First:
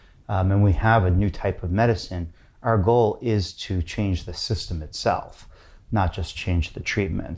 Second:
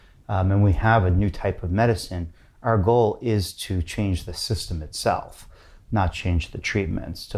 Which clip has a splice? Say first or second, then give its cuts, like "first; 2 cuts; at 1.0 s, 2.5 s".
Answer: second; 1 cut; at 6.1 s